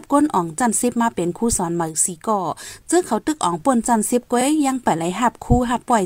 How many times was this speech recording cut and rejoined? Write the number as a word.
zero